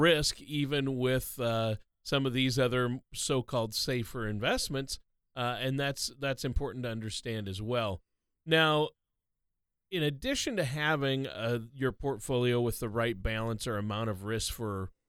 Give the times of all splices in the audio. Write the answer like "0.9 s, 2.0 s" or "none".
none